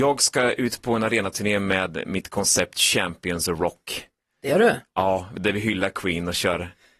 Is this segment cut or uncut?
uncut